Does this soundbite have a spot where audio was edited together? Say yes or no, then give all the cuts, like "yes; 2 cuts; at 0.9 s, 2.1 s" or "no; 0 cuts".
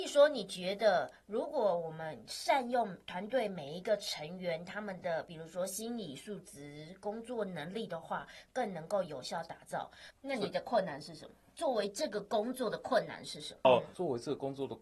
no; 0 cuts